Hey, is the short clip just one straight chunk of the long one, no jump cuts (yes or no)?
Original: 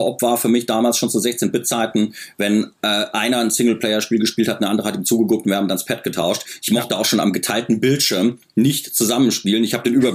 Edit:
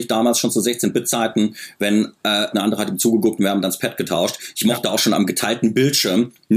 no